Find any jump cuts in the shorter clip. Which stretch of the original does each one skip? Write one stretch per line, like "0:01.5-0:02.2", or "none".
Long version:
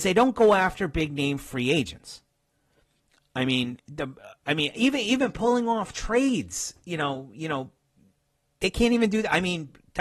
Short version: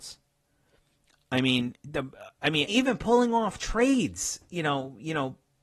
0:04.7-0:05.0